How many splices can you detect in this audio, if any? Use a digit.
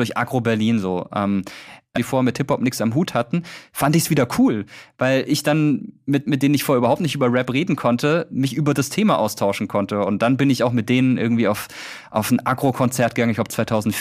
2